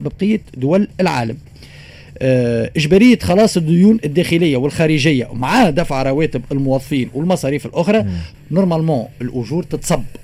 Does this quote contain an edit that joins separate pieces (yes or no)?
yes